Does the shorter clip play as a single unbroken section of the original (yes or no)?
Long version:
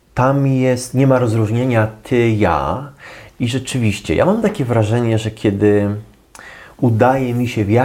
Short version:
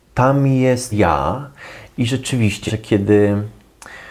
no